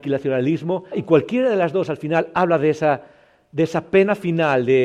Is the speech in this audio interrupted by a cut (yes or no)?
yes